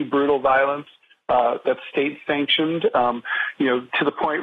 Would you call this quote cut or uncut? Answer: uncut